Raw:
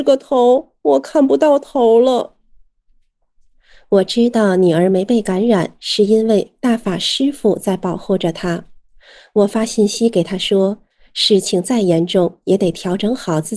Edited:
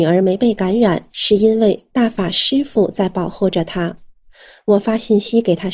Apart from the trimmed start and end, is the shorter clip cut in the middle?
no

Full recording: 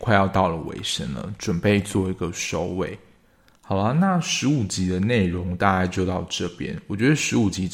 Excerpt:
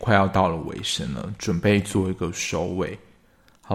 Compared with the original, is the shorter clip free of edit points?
yes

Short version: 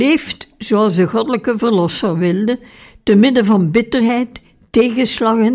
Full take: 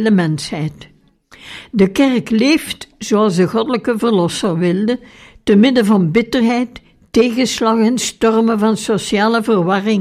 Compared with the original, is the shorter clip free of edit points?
yes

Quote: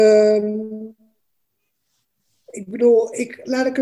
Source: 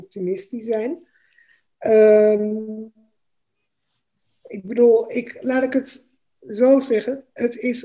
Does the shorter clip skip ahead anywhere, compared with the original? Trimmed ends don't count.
no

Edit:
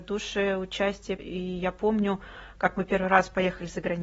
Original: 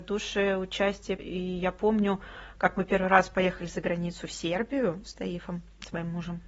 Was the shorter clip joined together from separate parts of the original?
no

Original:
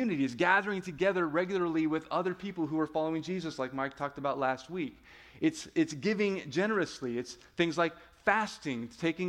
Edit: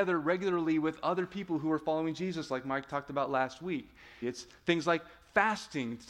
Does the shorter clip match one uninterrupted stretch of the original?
no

